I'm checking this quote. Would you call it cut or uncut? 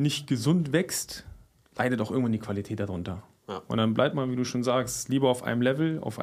uncut